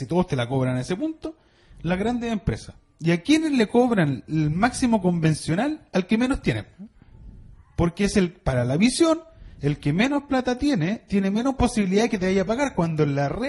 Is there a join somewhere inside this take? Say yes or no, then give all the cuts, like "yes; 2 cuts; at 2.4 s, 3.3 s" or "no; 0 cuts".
no; 0 cuts